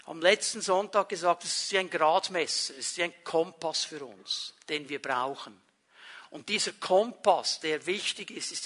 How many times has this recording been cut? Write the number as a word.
zero